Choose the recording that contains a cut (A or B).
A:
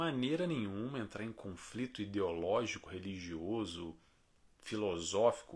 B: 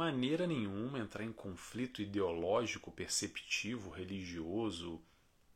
A